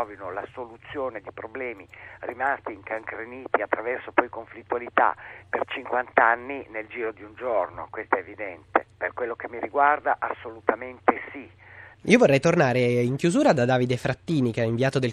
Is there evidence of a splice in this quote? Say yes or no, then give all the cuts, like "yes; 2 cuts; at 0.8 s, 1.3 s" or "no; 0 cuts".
yes; 2 cuts; at 8.9 s, 12.0 s